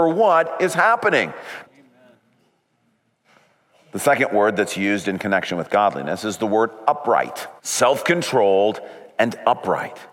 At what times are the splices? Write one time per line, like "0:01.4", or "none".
0:01.6
0:07.6